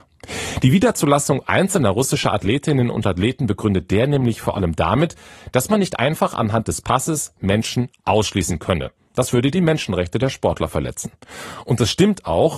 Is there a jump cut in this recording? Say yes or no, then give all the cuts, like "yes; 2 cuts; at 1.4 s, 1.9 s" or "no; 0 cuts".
no; 0 cuts